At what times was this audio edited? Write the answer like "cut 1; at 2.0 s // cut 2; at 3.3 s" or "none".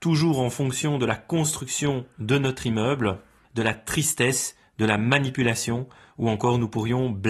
cut 1; at 3.4 s